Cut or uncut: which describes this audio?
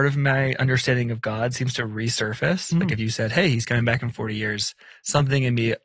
uncut